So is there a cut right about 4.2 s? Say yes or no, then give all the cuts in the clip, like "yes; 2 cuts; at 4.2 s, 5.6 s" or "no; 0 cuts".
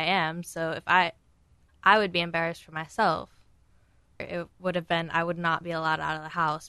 yes; 2 cuts; at 1.7 s, 4.2 s